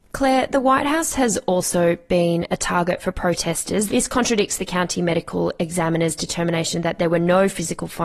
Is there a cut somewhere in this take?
yes; 1 cut; at 3.9 s

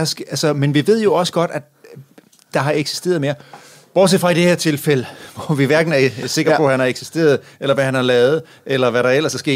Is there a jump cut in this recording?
no; 0 cuts

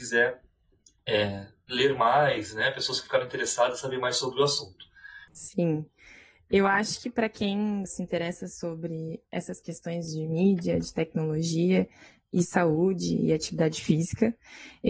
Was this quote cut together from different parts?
yes; 2 cuts; at 5.3 s, 7.8 s

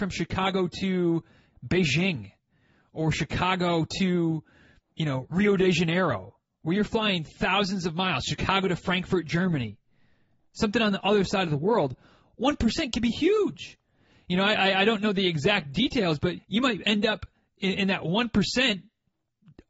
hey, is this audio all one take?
no; 1 cut; at 16.4 s

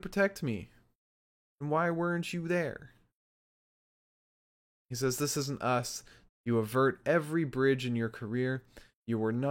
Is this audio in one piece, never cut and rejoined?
no; 2 cuts; at 4.7 s, 6.3 s

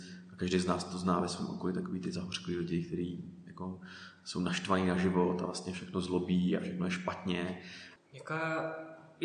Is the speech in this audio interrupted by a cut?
yes; 1 cut; at 8.0 s

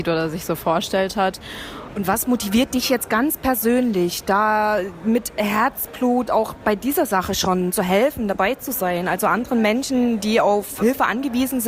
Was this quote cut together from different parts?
yes; 1 cut; at 1.9 s

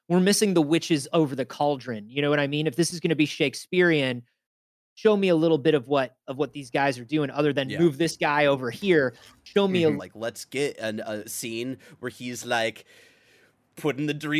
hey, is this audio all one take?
no; 2 cuts; at 10.0 s, 11.2 s

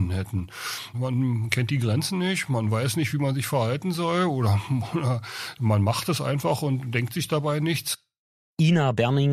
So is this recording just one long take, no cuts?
yes; 0 cuts

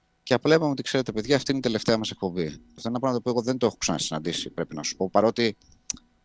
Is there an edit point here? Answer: yes; 1 cut; at 2.8 s

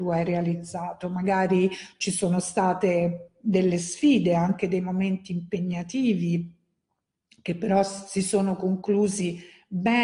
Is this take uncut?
yes; 0 cuts

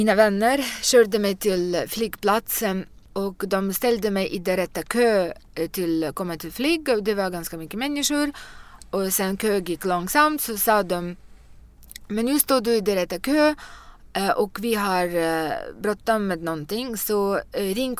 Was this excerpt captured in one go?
yes; 0 cuts

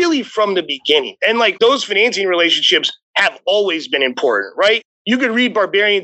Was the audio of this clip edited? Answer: yes; 1 cut; at 1.6 s

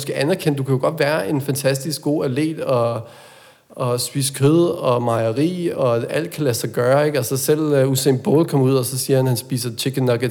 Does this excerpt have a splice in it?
no; 0 cuts

